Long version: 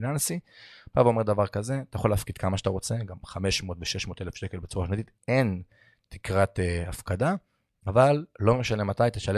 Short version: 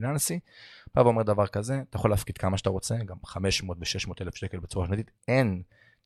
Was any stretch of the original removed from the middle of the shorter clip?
no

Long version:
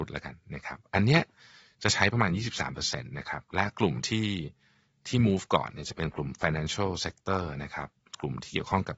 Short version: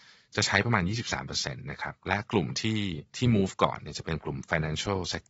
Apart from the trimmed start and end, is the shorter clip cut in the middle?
yes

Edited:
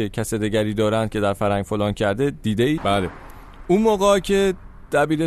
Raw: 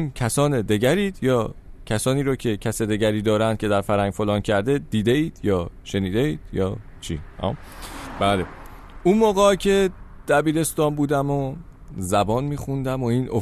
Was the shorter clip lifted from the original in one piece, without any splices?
no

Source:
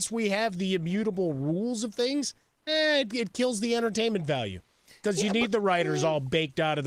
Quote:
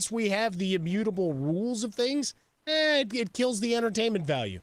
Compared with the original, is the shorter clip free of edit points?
yes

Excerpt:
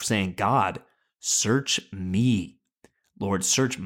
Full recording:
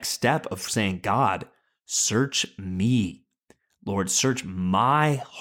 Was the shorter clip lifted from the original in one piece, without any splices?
yes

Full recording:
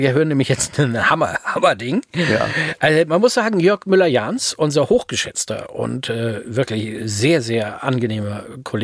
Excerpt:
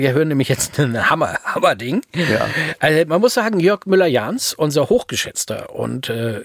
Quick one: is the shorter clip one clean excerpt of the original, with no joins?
yes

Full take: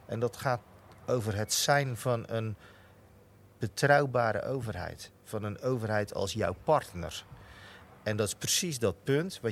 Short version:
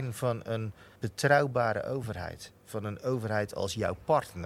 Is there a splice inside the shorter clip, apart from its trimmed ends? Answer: yes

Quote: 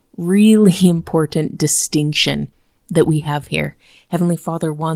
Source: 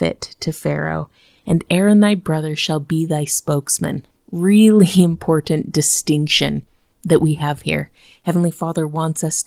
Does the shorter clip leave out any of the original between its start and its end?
no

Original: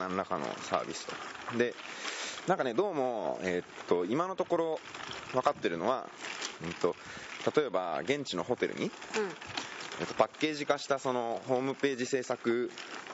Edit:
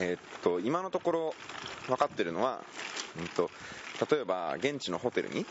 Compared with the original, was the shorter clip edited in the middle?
no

